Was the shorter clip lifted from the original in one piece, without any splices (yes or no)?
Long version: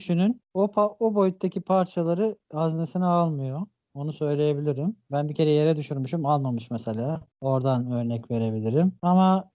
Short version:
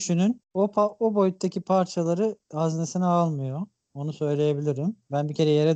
yes